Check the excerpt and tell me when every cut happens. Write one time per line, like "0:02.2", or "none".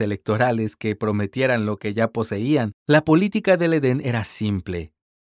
0:02.8